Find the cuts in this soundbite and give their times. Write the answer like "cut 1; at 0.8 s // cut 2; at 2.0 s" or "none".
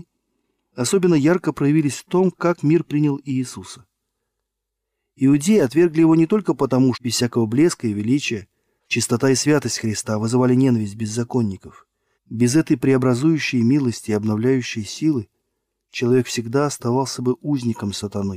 cut 1; at 6.9 s // cut 2; at 8.8 s // cut 3; at 12.1 s